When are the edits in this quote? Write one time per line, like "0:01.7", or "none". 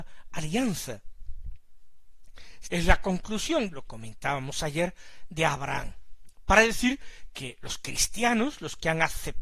0:02.6
0:03.7